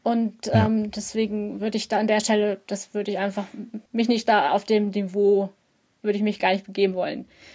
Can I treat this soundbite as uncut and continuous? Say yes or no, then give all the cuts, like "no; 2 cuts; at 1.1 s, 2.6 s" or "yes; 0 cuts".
no; 1 cut; at 3.9 s